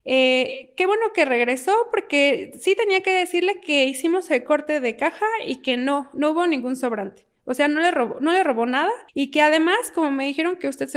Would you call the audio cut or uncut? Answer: cut